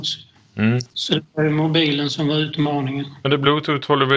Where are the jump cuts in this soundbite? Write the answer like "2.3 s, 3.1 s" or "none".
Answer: none